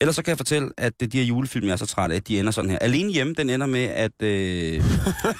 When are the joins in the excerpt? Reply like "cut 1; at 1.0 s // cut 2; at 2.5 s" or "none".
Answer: cut 1; at 2.2 s